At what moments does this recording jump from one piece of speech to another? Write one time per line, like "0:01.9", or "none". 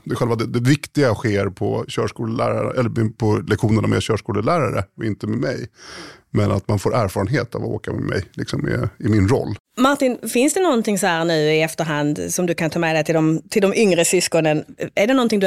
0:09.6